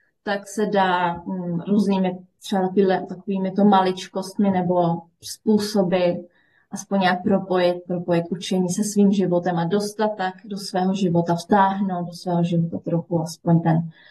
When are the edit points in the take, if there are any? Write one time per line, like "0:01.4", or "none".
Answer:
0:07.9